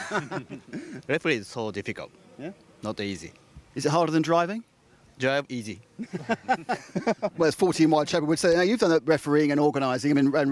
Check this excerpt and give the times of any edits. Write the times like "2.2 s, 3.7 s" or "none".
none